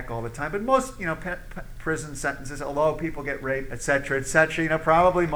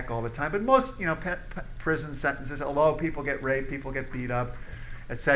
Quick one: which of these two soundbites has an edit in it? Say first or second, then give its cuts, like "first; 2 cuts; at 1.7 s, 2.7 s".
first; 1 cut; at 3.7 s